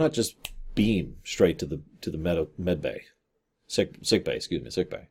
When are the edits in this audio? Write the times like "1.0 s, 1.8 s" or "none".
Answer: none